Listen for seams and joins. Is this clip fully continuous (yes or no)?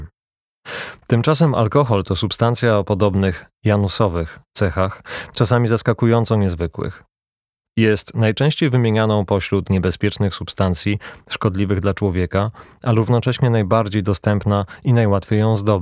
yes